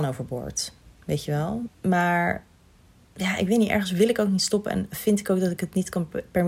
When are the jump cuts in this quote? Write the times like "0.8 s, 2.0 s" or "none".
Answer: 1.7 s